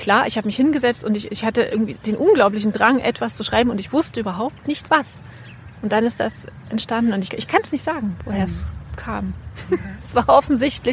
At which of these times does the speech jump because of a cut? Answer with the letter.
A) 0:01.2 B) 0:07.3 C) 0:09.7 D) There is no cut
B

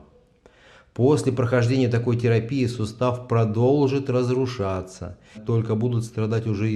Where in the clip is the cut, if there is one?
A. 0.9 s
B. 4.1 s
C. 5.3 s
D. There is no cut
C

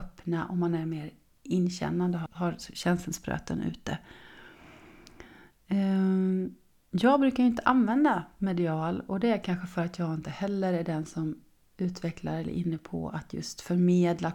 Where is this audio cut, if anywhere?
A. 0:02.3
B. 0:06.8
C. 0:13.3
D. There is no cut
A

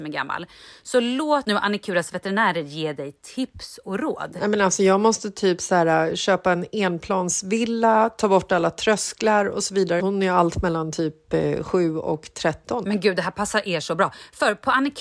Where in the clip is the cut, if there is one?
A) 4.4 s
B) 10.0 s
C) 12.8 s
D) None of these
B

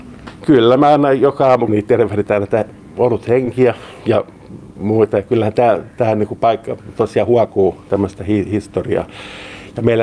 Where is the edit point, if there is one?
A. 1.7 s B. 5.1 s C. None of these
A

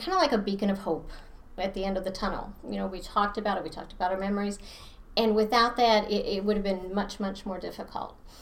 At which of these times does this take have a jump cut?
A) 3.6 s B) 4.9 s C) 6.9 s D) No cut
D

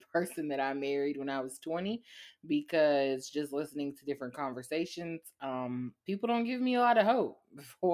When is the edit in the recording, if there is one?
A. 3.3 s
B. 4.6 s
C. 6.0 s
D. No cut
C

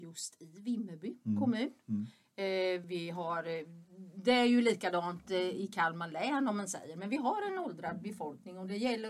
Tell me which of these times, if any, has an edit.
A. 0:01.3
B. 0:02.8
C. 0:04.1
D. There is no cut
B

